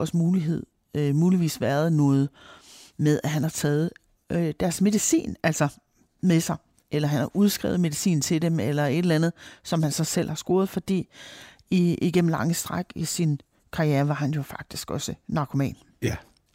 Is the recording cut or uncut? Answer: uncut